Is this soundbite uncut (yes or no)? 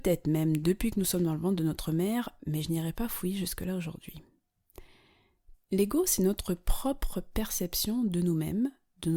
no